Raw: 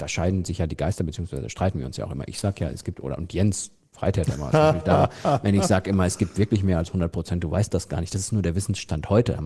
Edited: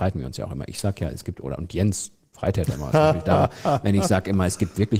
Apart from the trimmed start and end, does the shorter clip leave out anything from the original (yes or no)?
no